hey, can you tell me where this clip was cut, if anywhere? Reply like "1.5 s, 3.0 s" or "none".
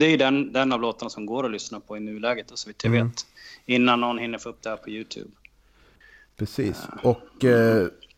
none